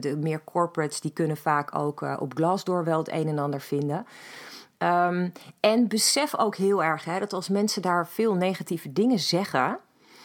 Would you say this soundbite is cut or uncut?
uncut